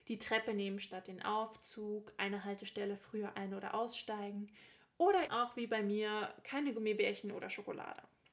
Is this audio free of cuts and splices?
no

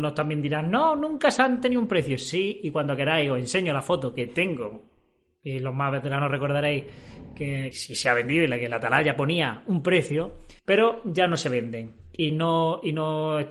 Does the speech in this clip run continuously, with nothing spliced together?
no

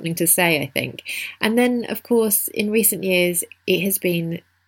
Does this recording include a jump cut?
yes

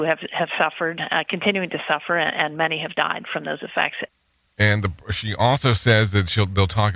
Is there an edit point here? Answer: no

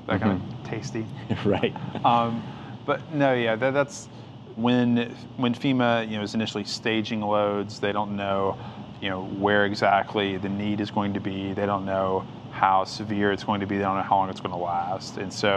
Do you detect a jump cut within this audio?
yes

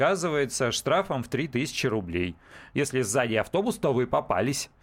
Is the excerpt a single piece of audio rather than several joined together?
no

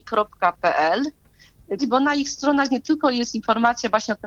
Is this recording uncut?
no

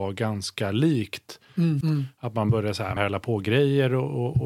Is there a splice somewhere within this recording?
yes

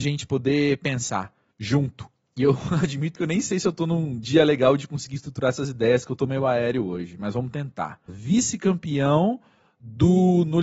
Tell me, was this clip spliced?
yes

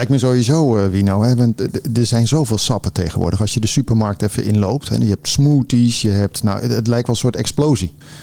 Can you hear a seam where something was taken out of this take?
no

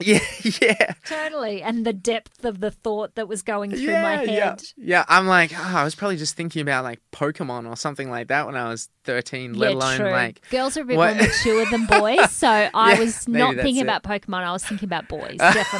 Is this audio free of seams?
yes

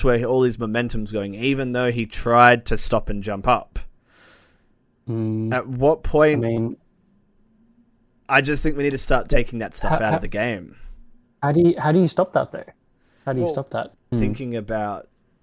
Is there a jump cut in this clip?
yes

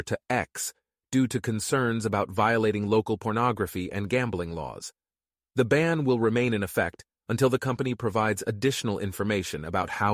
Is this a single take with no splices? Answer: yes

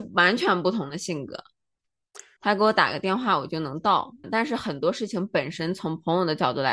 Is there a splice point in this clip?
yes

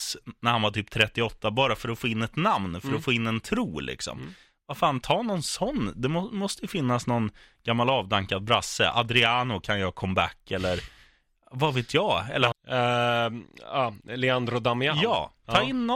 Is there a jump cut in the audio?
yes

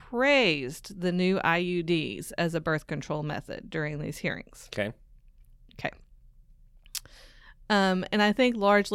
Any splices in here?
no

